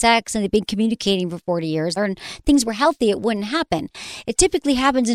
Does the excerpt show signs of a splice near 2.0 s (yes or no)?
yes